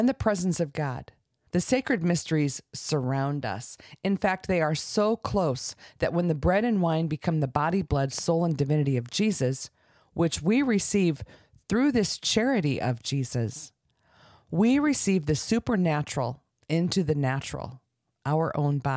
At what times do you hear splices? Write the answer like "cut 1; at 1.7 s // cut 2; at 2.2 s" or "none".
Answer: cut 1; at 1.5 s

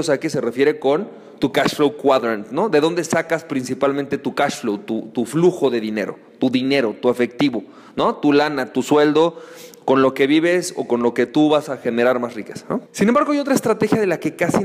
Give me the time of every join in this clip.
cut 1; at 12.9 s

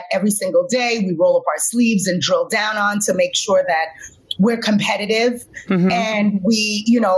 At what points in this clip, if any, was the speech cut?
none

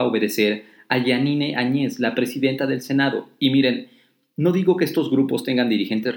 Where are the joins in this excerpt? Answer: none

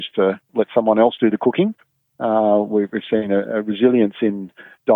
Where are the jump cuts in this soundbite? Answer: none

